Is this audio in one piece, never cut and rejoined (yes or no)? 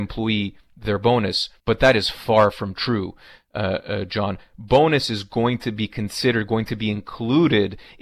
no